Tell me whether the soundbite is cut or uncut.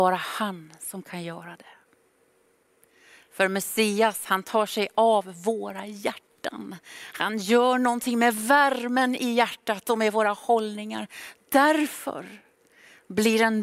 uncut